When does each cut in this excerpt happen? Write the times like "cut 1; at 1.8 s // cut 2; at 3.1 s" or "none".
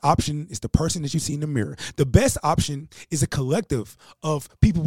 none